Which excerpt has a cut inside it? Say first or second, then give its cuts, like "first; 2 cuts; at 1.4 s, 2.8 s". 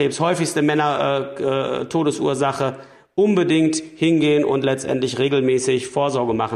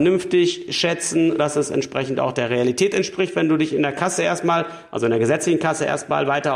second; 1 cut; at 1.4 s